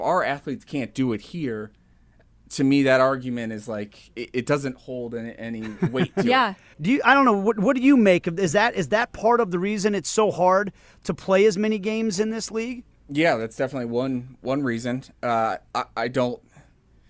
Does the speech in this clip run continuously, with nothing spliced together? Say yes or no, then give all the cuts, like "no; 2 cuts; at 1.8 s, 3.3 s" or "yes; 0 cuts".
no; 1 cut; at 6.7 s